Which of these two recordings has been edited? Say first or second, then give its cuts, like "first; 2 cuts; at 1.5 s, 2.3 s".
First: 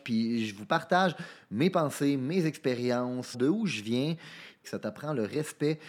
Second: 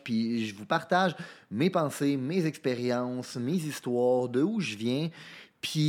first; 2 cuts; at 3.3 s, 4.6 s